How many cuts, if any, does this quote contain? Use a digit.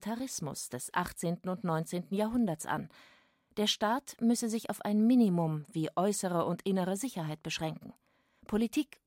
0